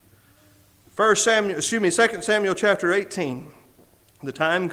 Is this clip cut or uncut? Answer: uncut